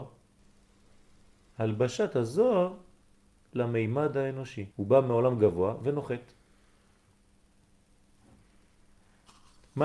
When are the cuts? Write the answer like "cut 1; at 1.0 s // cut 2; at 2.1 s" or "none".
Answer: cut 1; at 4.7 s